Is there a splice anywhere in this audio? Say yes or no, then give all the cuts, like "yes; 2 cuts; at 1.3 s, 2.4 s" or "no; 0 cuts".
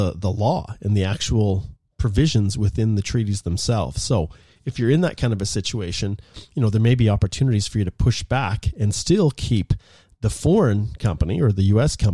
no; 0 cuts